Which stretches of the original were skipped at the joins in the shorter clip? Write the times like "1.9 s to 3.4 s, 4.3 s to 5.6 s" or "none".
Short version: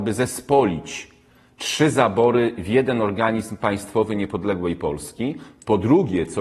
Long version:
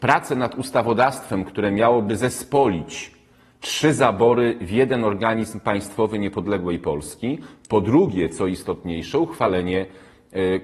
none